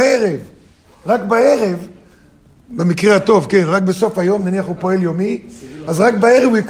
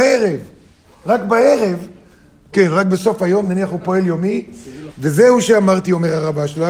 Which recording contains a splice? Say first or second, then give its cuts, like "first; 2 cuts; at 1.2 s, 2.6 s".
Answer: second; 2 cuts; at 2.5 s, 4.9 s